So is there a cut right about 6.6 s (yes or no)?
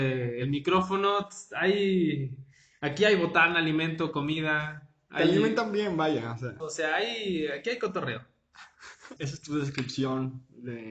yes